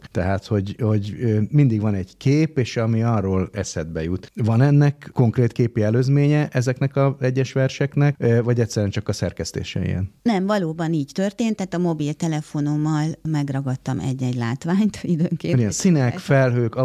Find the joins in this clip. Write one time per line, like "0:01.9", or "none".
none